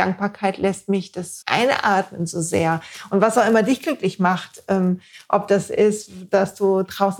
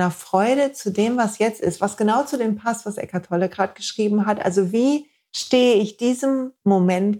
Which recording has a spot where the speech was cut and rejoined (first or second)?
first